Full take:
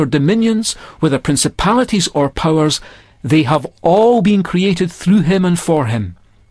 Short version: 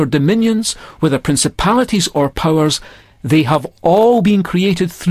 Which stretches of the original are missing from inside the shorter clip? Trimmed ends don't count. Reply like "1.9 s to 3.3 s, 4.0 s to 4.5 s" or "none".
none

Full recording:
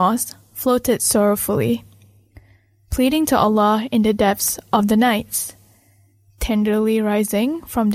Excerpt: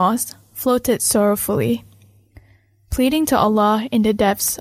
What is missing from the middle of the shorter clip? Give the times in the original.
none

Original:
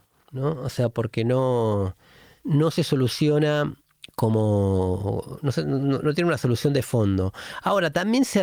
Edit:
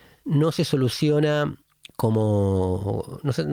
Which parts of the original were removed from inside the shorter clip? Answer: none

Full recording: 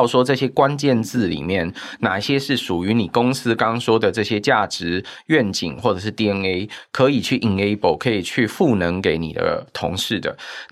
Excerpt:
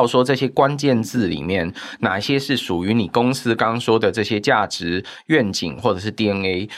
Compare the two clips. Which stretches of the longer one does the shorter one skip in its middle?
none

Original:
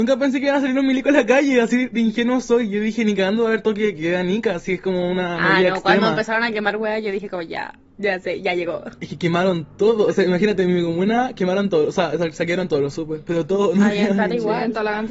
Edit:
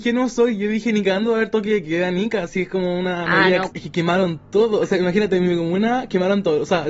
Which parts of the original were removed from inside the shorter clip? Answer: 5.8 s to 9.0 s

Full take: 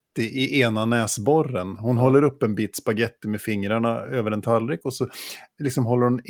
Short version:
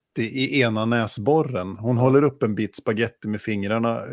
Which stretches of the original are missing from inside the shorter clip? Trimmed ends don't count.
none

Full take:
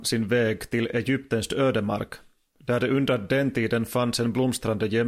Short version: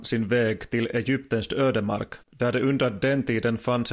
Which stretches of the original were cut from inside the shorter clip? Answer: 2.2 s to 2.5 s

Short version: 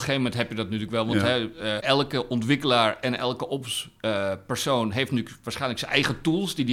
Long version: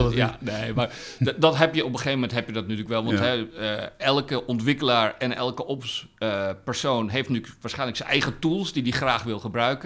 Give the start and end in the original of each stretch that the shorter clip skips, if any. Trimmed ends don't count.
3.8 s to 4.0 s

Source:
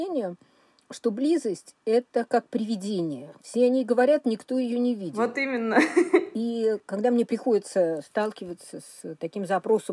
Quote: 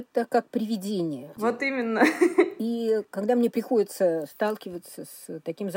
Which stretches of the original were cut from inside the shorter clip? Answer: 3.4 s to 5.1 s

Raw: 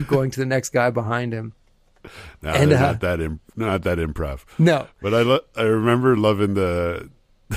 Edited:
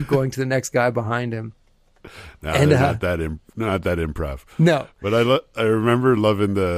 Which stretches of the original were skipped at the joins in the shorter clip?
none

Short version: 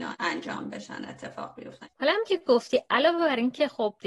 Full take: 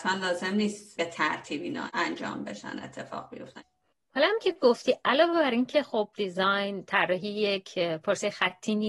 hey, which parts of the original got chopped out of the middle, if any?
3.7 s to 4.1 s

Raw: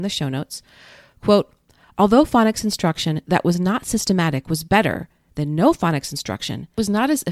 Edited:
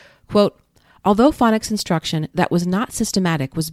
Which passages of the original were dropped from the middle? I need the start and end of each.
none

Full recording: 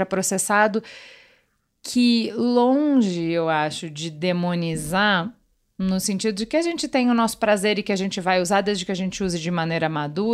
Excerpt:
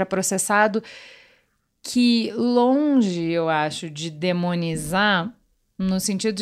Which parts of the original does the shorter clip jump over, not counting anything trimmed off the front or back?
none

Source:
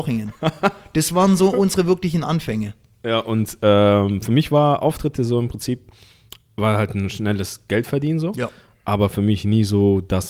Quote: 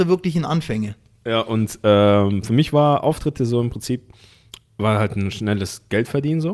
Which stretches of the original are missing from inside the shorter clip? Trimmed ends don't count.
none

